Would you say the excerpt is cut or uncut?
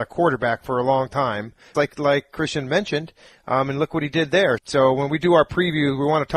cut